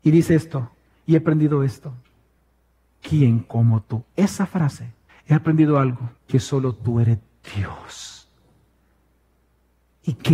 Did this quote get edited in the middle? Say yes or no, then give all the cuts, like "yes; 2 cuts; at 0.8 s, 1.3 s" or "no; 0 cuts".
yes; 2 cuts; at 5.1 s, 6.2 s